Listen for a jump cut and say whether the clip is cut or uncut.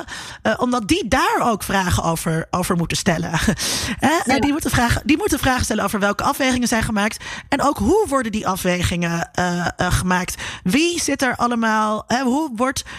uncut